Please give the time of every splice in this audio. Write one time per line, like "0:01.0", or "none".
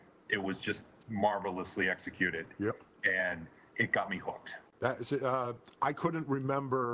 none